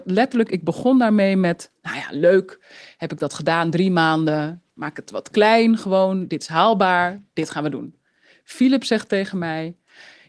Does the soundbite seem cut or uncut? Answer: cut